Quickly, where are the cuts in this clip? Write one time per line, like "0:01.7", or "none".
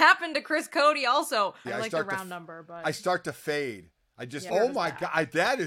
0:01.6
0:04.5